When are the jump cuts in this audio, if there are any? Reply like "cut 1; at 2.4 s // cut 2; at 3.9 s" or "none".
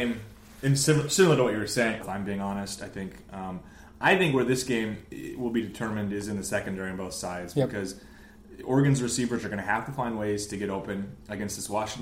cut 1; at 2.0 s